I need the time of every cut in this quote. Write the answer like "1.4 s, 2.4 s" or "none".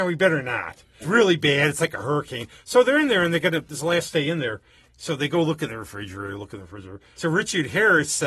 1.0 s, 4.9 s, 7.2 s